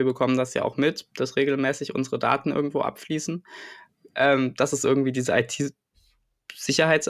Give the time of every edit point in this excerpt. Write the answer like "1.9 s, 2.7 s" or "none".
none

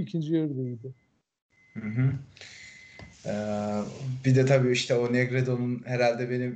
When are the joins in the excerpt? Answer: none

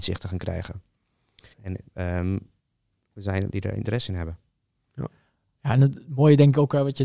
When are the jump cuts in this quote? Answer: 1.5 s, 3.5 s

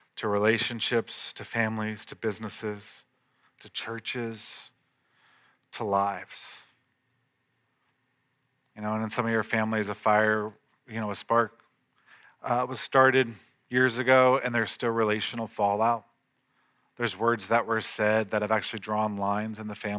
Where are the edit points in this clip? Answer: none

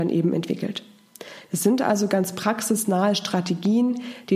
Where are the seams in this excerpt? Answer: none

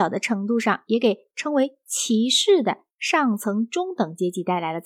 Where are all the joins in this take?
none

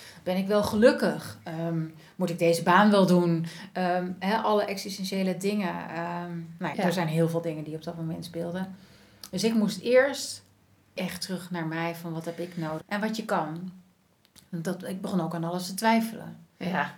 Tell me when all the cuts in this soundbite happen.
6.7 s, 12.8 s

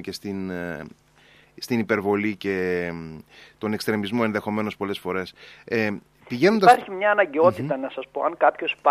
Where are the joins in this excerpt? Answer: none

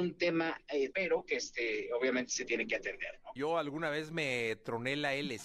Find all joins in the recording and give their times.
0.9 s, 3.4 s

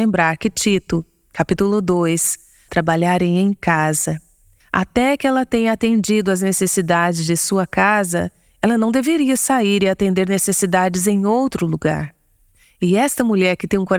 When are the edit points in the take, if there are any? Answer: 2.7 s, 4.6 s, 12.6 s

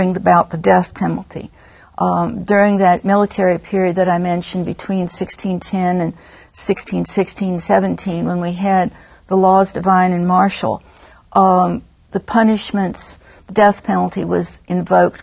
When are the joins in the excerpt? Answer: none

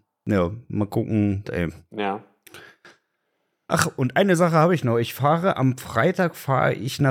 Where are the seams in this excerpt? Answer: 1.4 s

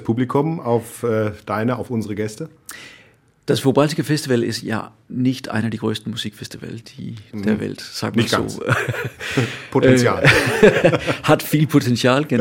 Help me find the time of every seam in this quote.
none

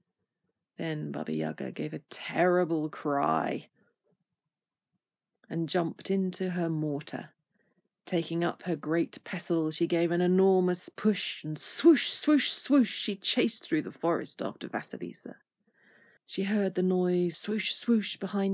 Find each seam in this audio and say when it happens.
16.2 s, 17.3 s

